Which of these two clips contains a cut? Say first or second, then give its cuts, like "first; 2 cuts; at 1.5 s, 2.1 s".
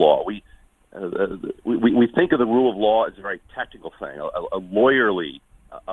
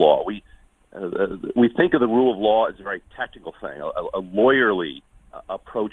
second; 1 cut; at 1.6 s